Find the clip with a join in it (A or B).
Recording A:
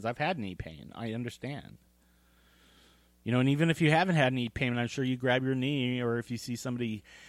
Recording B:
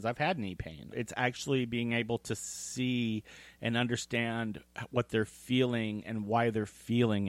B